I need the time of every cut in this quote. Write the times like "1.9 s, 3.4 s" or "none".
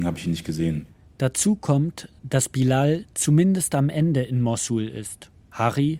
none